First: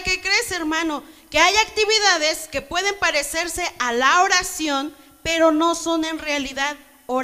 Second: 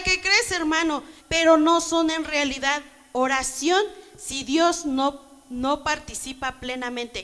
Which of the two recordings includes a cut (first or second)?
second